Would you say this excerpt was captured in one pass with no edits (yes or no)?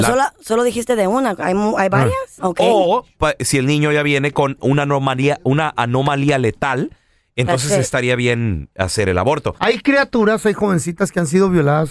no